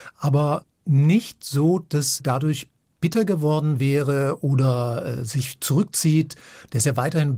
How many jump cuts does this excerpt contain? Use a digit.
1